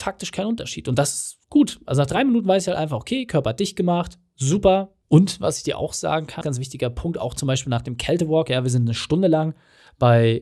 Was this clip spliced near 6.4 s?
yes; 2 cuts; at 5.0 s, 6.4 s

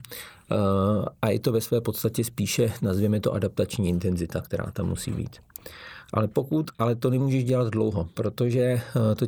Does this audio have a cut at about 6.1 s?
no; 0 cuts

